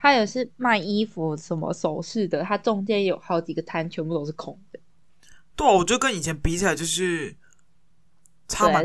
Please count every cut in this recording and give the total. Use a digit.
0